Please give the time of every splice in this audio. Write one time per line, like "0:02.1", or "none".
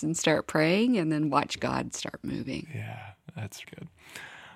0:03.6

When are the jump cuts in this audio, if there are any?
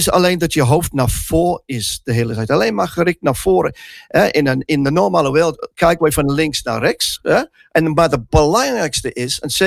0:07.7

